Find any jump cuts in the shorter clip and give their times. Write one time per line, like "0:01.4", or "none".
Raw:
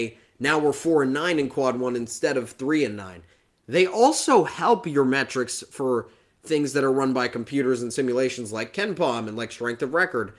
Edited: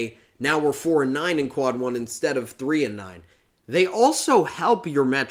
none